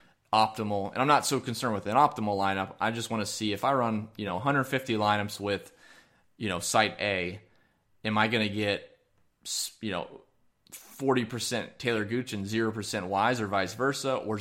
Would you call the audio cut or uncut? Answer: uncut